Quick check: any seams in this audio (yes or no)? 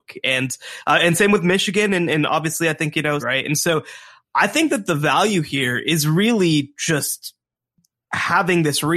yes